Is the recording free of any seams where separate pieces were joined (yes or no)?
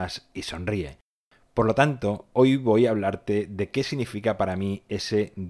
yes